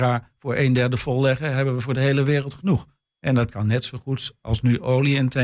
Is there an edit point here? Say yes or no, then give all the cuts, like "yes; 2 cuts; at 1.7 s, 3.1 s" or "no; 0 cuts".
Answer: yes; 1 cut; at 3.1 s